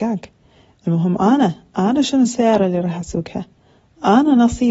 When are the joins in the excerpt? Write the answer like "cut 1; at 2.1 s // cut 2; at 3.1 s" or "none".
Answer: none